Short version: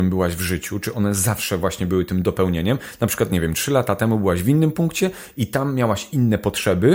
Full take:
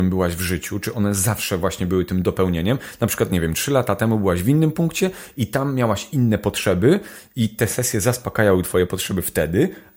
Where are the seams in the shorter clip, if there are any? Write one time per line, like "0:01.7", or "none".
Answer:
none